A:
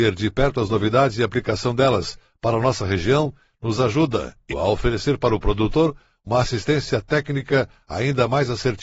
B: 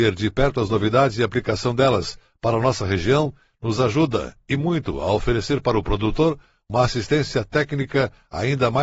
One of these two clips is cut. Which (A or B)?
A